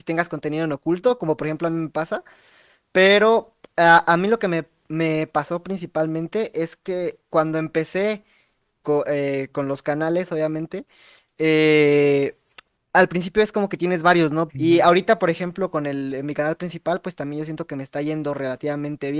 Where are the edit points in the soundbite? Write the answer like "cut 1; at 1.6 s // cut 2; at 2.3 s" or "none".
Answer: cut 1; at 14.5 s